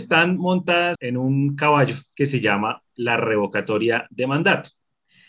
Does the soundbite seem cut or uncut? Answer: cut